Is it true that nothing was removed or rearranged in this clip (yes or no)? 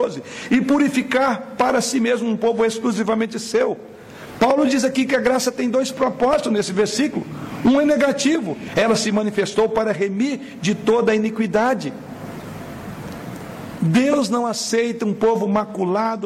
no